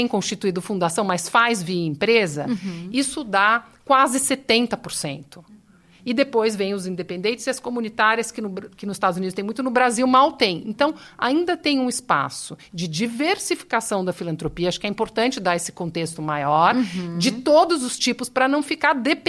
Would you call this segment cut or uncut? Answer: uncut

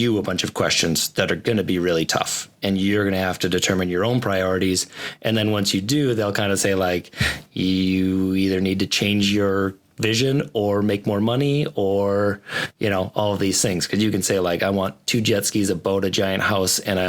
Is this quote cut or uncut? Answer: uncut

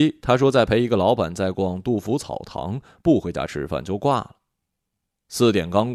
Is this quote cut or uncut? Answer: uncut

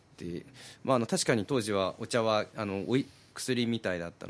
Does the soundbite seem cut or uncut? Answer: cut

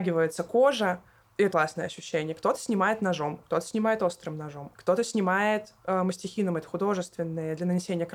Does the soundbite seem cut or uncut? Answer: cut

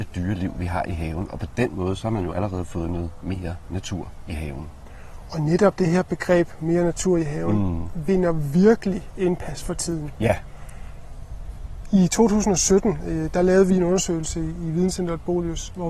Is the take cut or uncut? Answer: uncut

